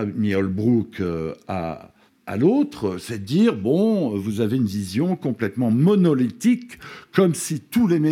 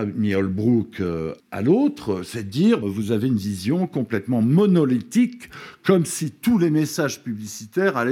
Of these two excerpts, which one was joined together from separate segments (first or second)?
second